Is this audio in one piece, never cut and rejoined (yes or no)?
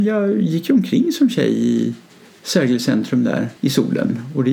no